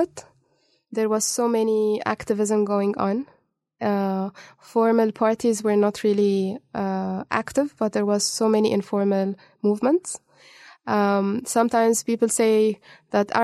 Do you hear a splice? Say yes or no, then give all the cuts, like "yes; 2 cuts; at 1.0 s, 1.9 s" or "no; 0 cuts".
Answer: no; 0 cuts